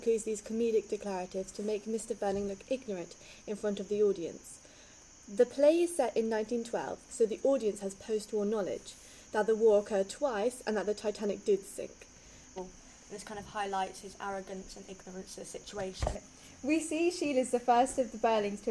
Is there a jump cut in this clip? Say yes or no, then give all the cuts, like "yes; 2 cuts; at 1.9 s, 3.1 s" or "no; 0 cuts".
yes; 2 cuts; at 7.1 s, 12.6 s